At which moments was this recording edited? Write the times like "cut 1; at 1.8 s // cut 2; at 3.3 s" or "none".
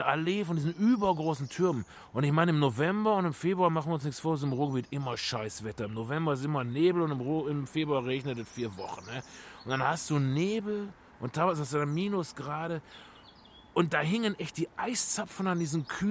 none